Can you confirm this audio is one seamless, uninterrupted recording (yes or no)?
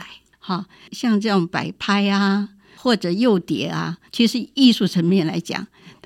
yes